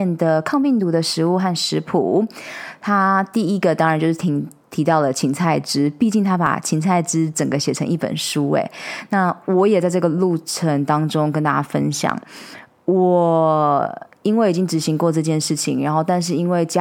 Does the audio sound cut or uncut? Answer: uncut